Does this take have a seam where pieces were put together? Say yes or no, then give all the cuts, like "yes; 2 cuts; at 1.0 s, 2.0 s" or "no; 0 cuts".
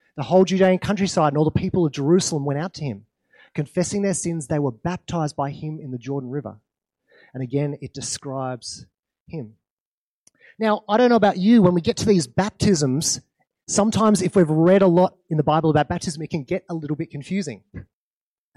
no; 0 cuts